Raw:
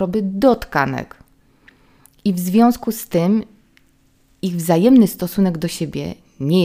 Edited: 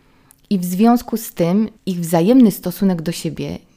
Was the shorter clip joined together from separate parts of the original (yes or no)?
yes